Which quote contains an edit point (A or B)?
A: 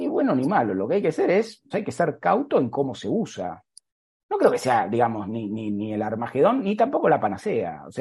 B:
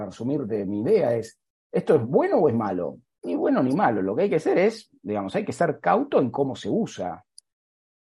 A